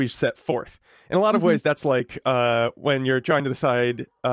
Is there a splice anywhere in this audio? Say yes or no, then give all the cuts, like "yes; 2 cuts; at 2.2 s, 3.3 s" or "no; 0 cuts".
no; 0 cuts